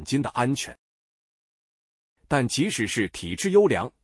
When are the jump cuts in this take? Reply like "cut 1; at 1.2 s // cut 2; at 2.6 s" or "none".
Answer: cut 1; at 2.2 s